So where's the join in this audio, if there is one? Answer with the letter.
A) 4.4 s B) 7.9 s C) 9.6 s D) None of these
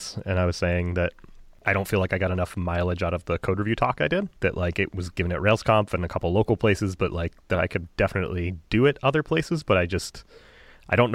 A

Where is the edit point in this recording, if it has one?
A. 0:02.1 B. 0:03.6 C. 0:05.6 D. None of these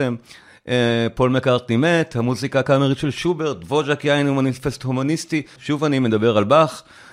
C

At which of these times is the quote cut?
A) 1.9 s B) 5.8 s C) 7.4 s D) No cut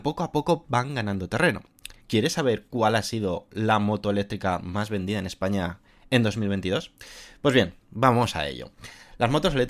A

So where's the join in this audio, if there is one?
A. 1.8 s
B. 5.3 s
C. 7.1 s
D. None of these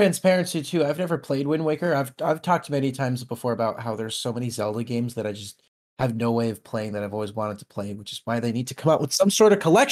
D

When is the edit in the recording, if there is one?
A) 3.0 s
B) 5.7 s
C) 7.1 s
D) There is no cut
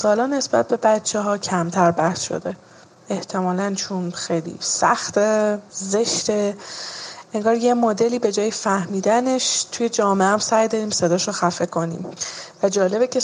B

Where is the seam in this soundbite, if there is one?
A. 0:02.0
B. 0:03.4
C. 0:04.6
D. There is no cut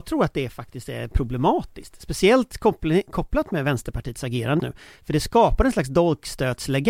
C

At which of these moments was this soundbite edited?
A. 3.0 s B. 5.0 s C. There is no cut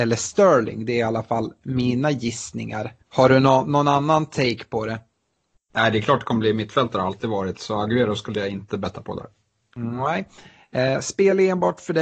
A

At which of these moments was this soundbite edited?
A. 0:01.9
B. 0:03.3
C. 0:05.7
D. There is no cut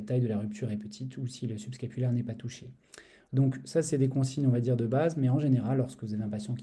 B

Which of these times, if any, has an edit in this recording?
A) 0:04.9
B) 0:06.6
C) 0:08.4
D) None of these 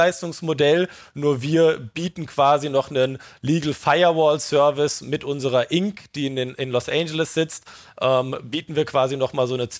D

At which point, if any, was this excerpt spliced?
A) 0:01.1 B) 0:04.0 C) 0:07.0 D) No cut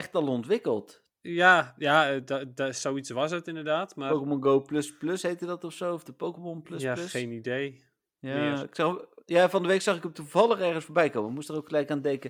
A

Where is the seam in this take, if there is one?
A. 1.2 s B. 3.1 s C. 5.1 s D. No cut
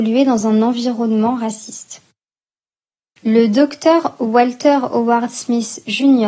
B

